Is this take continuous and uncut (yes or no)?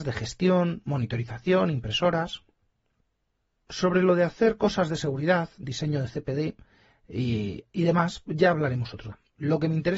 yes